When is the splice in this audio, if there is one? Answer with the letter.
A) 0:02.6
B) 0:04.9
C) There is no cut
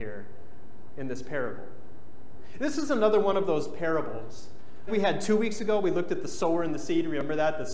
B